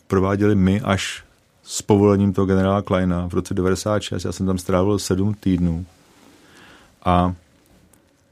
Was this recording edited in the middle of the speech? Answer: no; 0 cuts

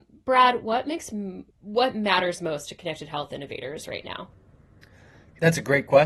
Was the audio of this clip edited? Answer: yes; 1 cut; at 1.5 s

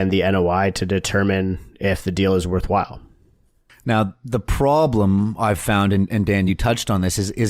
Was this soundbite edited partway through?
no; 0 cuts

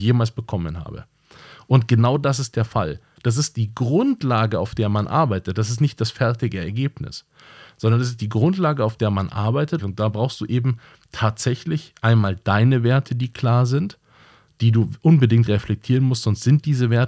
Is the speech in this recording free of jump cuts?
no; 2 cuts; at 3.2 s, 9.8 s

